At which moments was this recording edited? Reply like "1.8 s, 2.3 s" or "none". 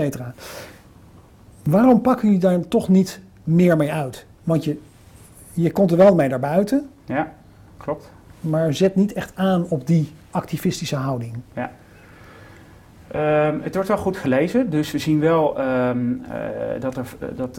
none